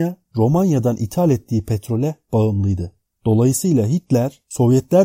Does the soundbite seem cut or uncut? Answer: uncut